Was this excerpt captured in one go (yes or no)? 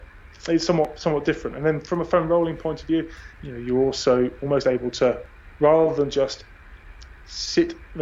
no